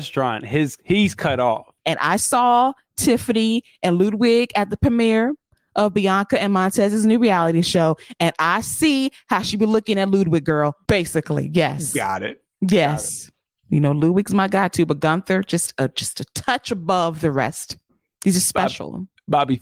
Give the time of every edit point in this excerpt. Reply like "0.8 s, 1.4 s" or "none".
1.8 s, 10.9 s